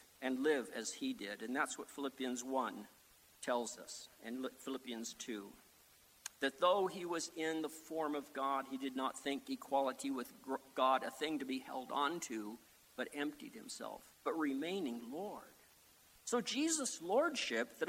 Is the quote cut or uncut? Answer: cut